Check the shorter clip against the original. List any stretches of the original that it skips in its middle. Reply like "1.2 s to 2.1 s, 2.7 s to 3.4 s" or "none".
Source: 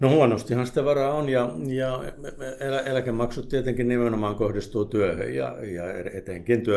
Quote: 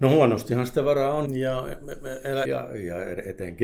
1.3 s to 1.6 s, 2.8 s to 5.3 s